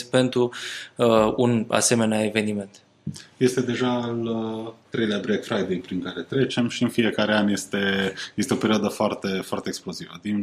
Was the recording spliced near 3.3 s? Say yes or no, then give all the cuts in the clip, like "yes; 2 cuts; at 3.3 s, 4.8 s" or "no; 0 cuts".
no; 0 cuts